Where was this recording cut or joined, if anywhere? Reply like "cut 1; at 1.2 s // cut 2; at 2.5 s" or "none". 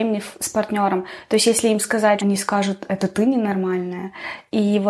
cut 1; at 2.2 s